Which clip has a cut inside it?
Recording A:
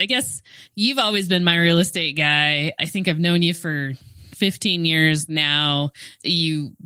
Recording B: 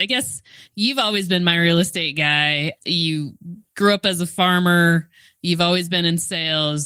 B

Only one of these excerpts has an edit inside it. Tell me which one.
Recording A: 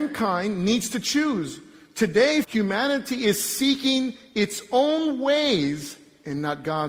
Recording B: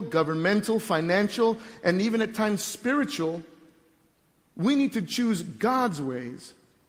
A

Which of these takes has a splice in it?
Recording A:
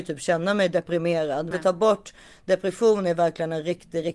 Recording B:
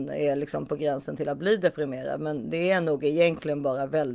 A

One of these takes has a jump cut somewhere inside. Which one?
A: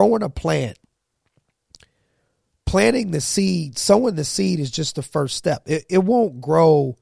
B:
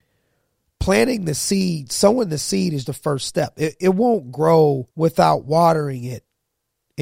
B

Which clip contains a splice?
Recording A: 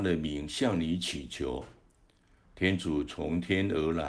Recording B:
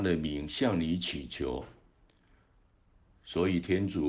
A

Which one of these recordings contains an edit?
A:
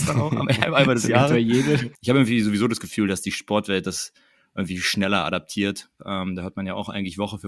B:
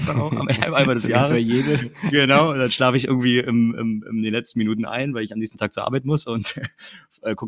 A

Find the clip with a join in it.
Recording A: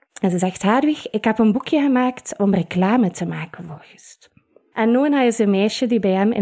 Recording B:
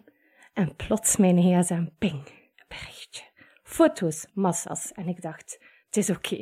A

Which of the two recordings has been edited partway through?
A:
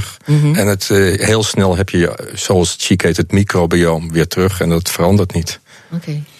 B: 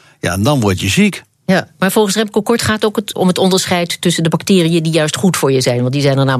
B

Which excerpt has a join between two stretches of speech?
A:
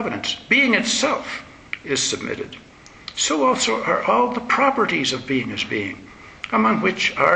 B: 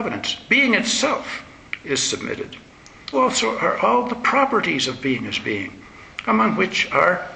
B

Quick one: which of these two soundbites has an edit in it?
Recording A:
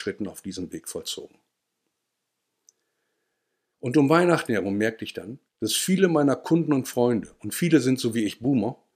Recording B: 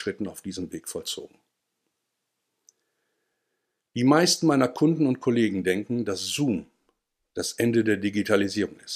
A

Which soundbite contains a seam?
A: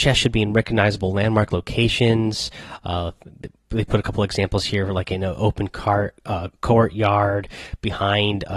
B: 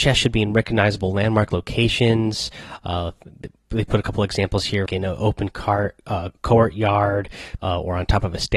B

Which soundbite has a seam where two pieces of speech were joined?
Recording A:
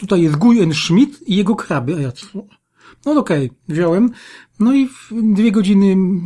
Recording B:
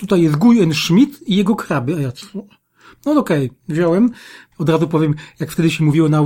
B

